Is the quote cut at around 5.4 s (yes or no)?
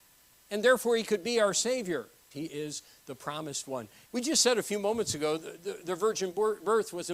no